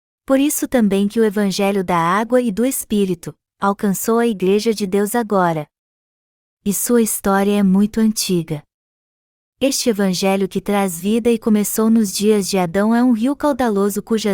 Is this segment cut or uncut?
cut